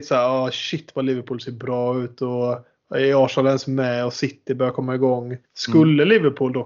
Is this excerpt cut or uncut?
cut